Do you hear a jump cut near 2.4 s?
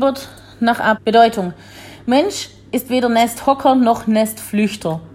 no; 1 cut; at 0.9 s

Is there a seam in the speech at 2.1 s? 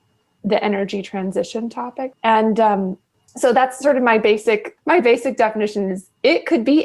yes; 1 cut; at 2.1 s

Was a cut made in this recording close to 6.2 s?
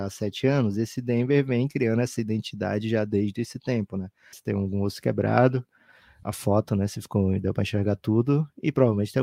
yes; 2 cuts; at 4.3 s, 6.2 s

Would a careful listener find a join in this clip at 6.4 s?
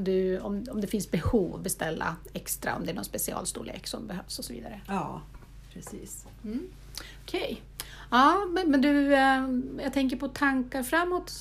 no; 0 cuts

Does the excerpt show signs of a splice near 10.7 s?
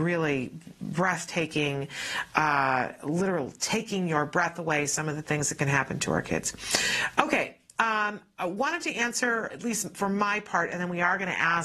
no; 1 cut; at 9.5 s

